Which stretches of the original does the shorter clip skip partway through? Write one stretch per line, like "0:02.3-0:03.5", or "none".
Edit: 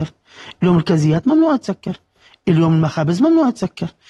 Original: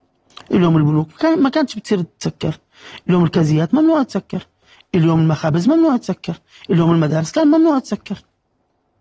none